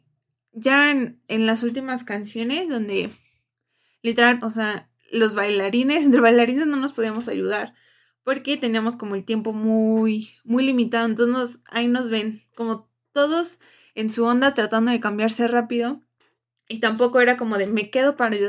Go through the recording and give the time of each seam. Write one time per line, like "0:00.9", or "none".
0:04.4